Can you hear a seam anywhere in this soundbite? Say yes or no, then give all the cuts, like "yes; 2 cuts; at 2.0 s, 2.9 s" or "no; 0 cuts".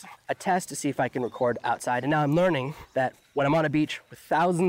no; 0 cuts